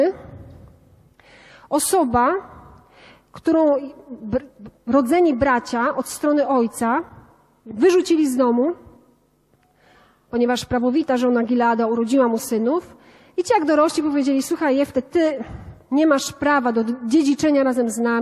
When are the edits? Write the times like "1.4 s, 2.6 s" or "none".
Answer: none